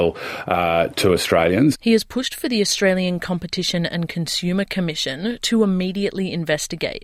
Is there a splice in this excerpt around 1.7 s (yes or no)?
yes